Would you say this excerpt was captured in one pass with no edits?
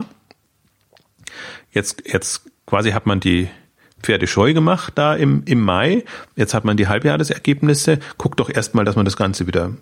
yes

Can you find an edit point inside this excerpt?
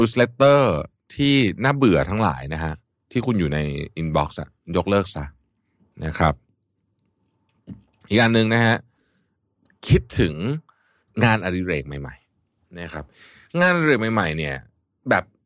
no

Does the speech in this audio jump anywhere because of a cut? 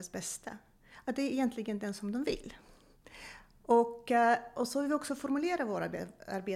no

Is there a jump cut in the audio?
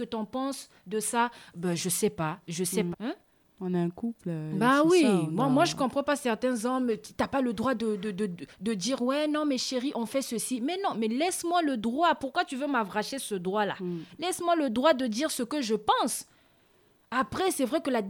yes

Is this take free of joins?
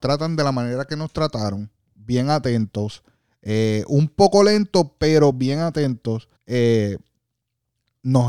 no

